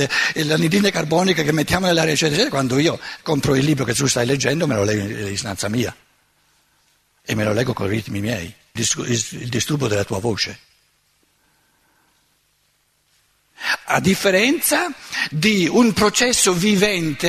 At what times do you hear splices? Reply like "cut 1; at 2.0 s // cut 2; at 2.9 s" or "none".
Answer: cut 1; at 8.8 s